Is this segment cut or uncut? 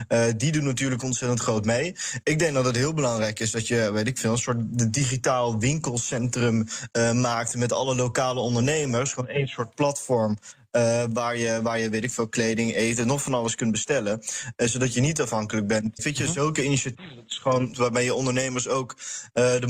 cut